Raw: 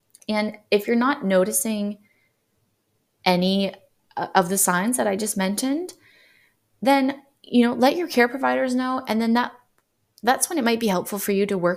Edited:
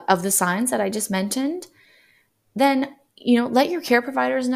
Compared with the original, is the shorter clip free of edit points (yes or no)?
yes